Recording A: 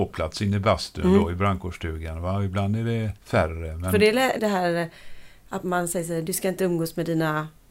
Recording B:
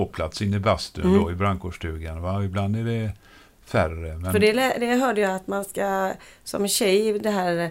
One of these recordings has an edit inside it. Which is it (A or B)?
A